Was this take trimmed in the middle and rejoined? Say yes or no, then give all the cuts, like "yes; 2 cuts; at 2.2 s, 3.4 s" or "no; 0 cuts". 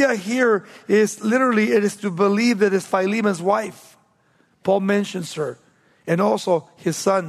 no; 0 cuts